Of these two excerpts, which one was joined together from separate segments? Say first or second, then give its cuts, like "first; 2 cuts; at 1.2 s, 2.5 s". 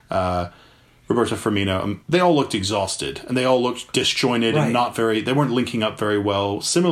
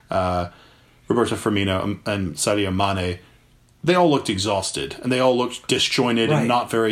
first; 1 cut; at 2.0 s